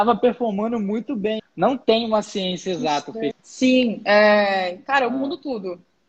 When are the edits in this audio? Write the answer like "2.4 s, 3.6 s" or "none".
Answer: 1.4 s, 3.3 s